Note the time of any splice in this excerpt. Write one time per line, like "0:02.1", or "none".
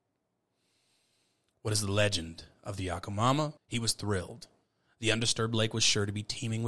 0:03.6